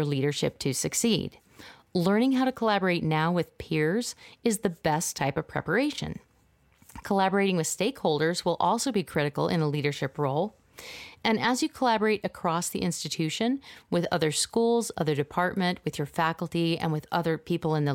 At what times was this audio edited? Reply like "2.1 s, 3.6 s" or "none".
none

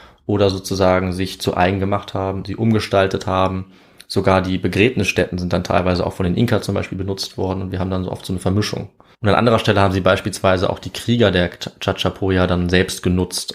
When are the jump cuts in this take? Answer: 2.4 s, 9.1 s

